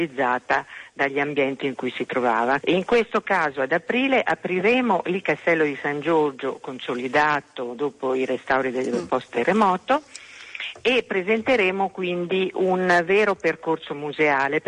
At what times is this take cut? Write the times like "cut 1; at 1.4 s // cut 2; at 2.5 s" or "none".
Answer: cut 1; at 2.6 s